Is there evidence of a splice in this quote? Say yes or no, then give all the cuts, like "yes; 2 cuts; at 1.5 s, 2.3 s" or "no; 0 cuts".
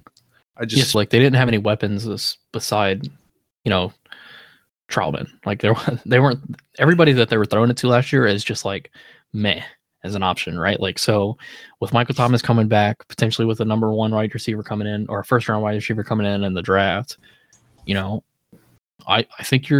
yes; 1 cut; at 0.9 s